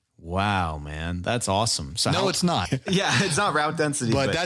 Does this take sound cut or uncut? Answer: cut